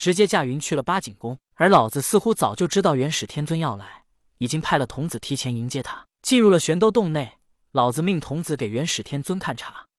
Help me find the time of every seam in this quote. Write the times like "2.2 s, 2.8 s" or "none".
none